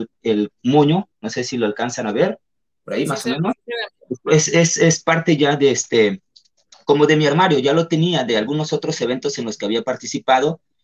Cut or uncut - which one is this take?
uncut